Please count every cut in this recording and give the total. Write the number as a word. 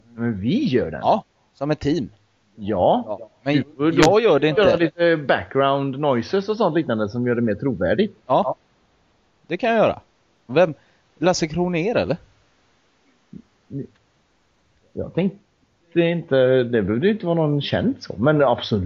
one